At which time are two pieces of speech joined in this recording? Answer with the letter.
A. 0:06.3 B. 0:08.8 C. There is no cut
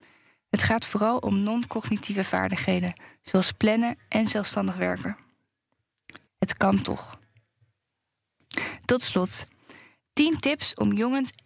A